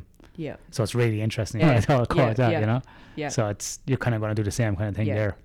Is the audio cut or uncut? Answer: cut